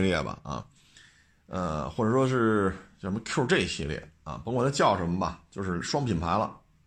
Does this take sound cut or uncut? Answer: uncut